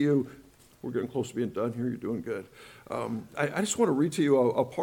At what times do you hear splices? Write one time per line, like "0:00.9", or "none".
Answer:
none